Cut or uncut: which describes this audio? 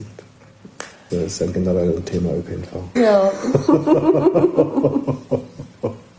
cut